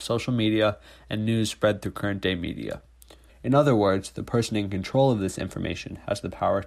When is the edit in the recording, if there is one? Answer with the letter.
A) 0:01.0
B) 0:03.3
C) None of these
B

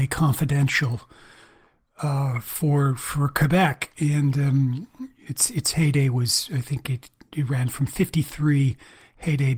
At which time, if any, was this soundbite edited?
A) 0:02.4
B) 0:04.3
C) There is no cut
C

